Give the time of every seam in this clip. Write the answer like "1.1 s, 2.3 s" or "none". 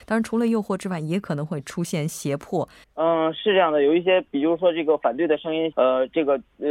2.8 s, 5.7 s

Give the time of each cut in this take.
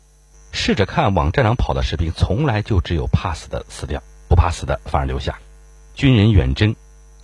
none

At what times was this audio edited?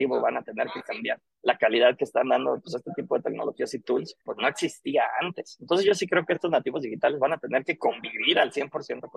1.4 s, 4.2 s

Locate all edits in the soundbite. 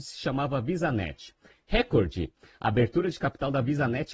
1.5 s

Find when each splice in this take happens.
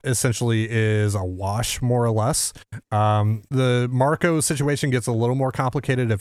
none

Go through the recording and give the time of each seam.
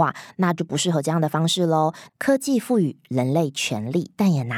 2.1 s

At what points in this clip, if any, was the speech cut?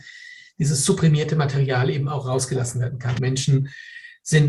3.2 s

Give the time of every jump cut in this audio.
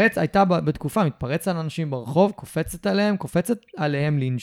none

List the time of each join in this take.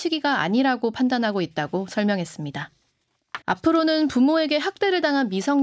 3.4 s

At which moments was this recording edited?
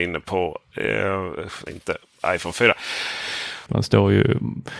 1.7 s, 3.7 s

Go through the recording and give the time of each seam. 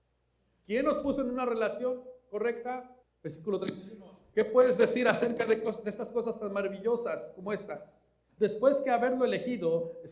3.0 s, 8.3 s

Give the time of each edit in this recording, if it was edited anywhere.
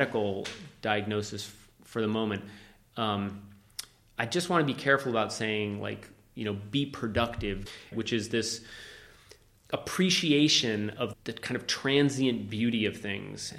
7.9 s, 11.1 s

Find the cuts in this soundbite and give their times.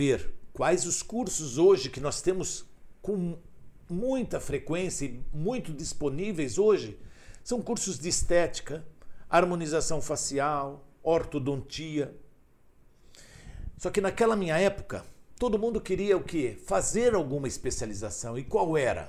none

